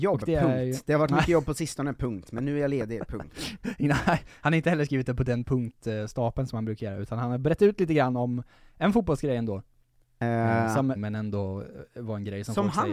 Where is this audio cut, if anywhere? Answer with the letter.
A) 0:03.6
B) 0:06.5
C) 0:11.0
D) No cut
C